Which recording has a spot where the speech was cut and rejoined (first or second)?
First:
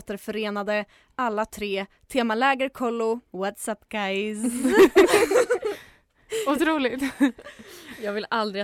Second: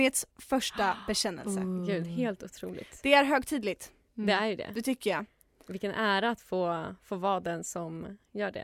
first